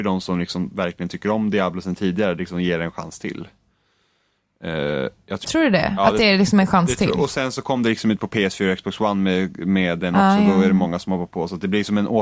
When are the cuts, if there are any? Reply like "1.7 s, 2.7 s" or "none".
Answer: 5.4 s

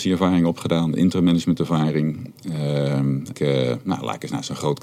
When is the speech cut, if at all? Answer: 3.3 s

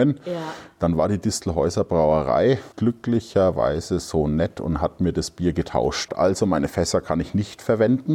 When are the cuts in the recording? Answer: 2.7 s, 6.1 s

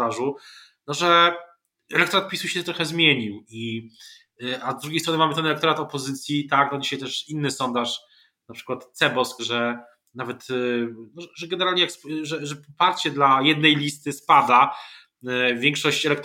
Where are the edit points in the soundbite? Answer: 9.4 s

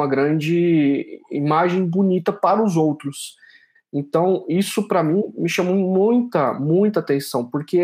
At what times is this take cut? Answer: 3.7 s

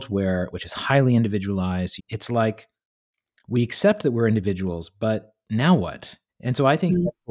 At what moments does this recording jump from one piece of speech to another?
2.0 s, 6.3 s

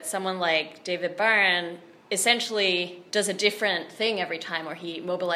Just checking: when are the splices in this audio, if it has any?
3.1 s

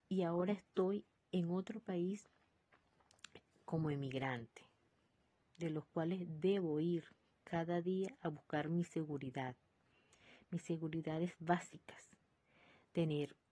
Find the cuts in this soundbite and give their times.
none

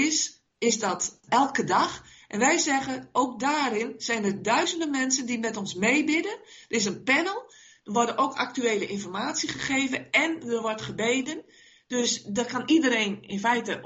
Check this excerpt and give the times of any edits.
1.3 s

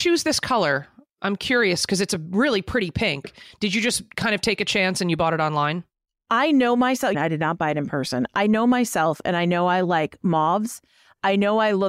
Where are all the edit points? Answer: 7.1 s

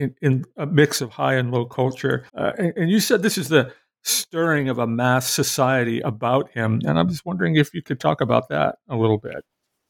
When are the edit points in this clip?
2.3 s

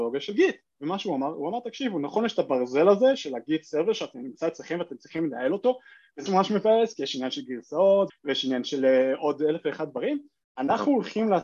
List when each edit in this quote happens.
6.3 s, 8.1 s, 10.5 s

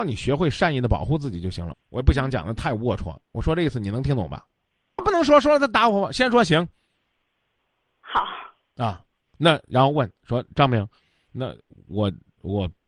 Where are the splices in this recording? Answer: 1.7 s, 5.0 s

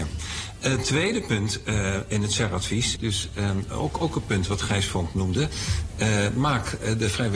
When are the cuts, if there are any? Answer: 3.0 s

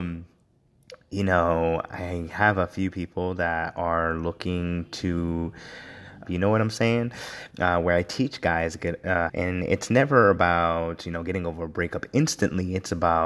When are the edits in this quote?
6.2 s, 7.5 s, 9.3 s

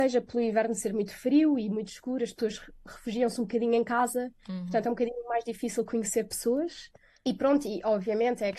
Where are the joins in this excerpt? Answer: none

